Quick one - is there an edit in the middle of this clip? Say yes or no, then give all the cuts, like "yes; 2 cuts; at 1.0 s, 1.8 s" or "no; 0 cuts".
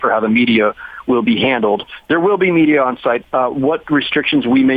yes; 1 cut; at 3.2 s